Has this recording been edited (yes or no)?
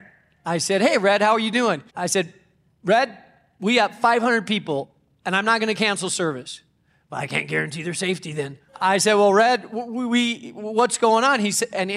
yes